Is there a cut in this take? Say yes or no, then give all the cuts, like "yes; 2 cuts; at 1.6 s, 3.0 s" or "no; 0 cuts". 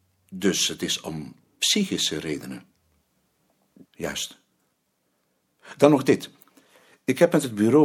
yes; 1 cut; at 3.9 s